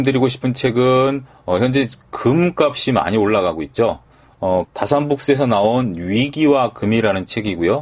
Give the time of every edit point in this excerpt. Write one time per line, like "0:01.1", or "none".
0:04.6